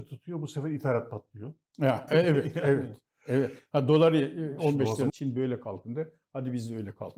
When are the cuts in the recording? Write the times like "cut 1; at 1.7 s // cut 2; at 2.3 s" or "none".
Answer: cut 1; at 2.1 s // cut 2; at 5.1 s